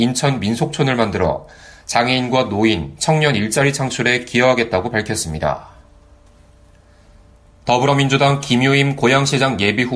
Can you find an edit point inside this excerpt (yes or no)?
no